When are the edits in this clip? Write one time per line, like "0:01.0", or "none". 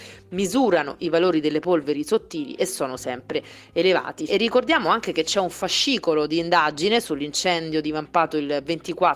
0:04.3

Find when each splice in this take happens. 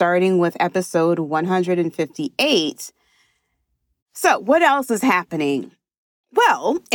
0:04.0

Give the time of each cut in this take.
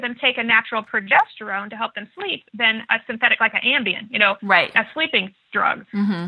none

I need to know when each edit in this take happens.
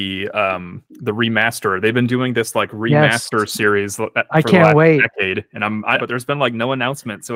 0:06.0

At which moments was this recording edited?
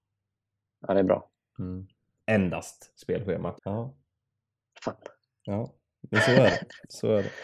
0:02.2
0:03.6

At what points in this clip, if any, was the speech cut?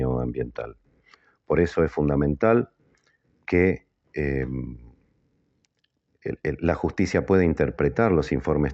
none

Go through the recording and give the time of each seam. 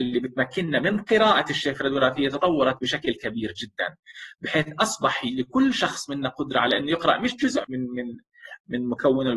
0:07.6

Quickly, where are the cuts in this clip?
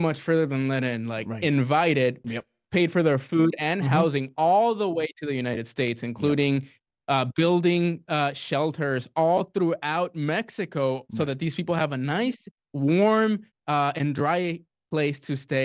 0:02.2

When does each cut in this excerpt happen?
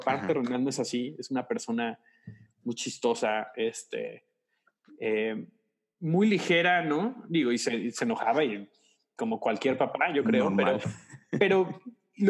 none

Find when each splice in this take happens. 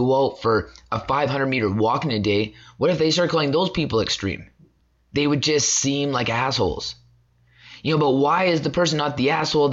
none

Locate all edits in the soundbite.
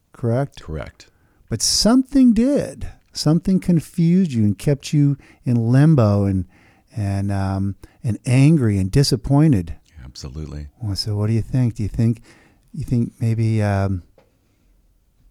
0:09.8

